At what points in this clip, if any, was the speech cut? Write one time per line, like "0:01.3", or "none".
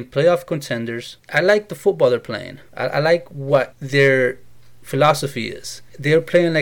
none